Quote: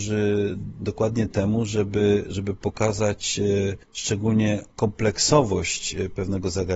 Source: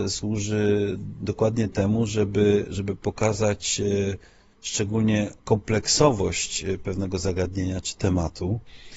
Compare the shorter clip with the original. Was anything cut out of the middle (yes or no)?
yes